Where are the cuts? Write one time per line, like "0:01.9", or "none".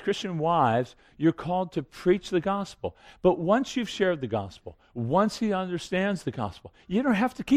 none